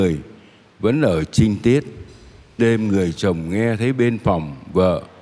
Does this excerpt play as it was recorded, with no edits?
no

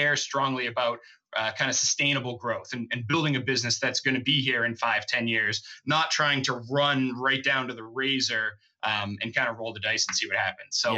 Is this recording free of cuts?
yes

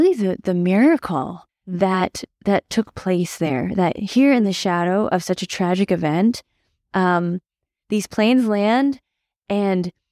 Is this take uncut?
no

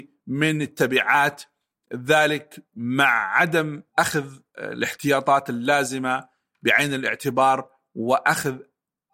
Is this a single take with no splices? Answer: yes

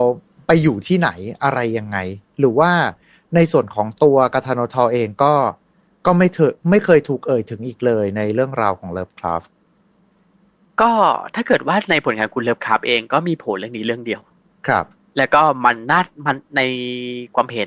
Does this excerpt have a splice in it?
no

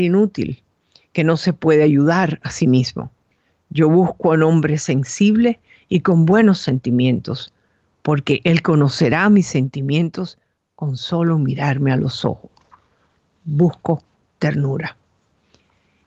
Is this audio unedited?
yes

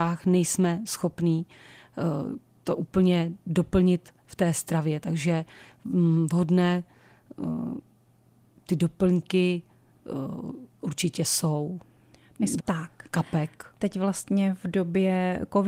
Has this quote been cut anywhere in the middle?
yes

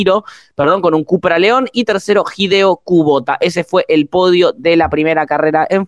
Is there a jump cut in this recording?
no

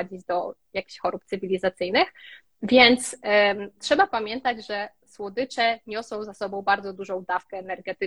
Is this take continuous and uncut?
yes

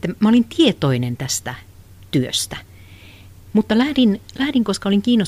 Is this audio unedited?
no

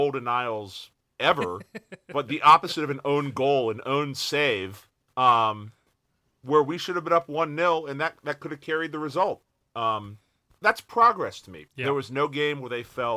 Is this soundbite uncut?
no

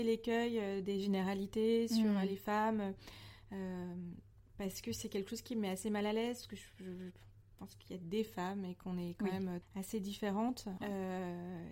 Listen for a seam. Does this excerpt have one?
yes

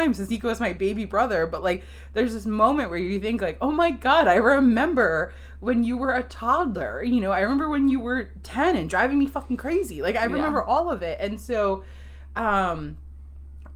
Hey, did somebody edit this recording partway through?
no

